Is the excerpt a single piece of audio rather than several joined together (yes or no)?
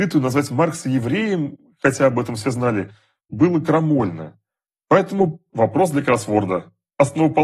no